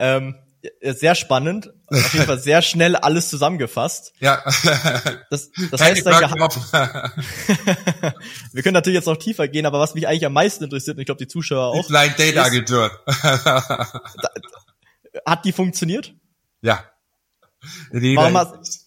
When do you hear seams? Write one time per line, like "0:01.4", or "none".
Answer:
none

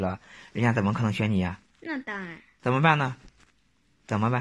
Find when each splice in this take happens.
none

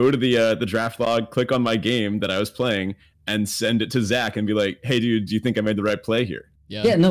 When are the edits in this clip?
none

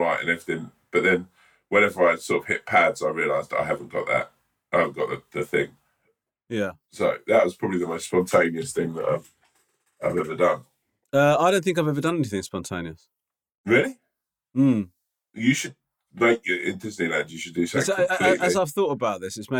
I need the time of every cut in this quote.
none

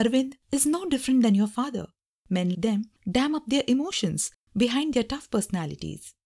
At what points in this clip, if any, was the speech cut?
0:02.5

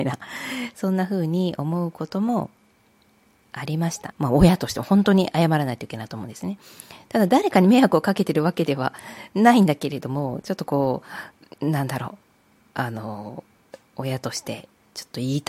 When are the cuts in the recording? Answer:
0:04.1
0:11.5

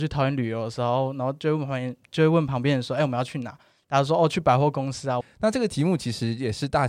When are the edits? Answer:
0:05.2

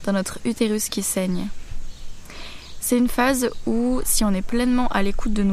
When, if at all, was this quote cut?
none

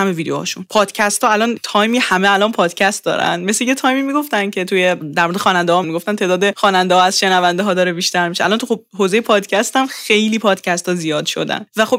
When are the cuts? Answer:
0:05.8

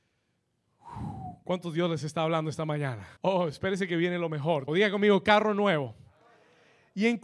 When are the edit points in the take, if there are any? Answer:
0:03.2
0:04.7

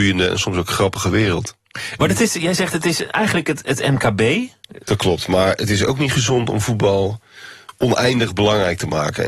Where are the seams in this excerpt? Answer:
0:02.0
0:04.8

